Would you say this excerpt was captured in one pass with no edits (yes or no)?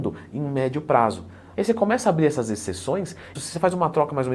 no